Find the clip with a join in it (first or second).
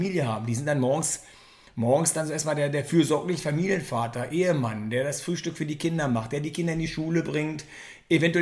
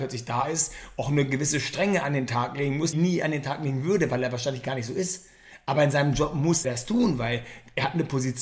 second